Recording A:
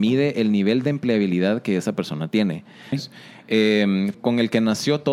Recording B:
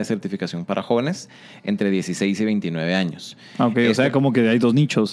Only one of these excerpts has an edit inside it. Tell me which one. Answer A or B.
A